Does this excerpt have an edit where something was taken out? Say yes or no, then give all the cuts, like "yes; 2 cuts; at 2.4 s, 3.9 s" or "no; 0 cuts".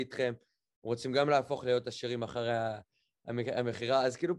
no; 0 cuts